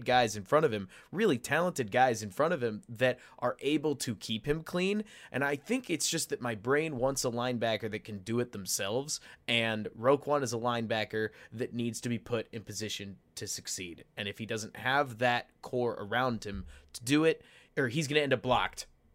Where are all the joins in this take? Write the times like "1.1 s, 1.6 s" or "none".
17.7 s